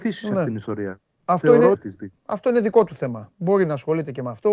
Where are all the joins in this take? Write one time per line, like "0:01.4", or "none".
0:01.7